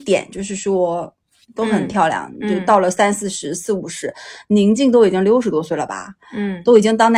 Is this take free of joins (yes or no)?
no